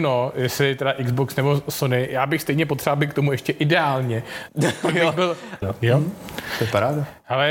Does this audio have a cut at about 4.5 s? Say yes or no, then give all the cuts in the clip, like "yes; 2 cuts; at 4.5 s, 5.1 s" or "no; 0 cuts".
yes; 2 cuts; at 4.5 s, 5.6 s